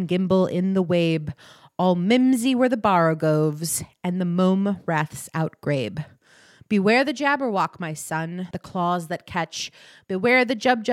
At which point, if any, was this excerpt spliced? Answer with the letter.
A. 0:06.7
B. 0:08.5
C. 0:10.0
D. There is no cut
B